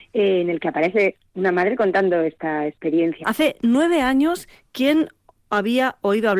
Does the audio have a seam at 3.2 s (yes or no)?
yes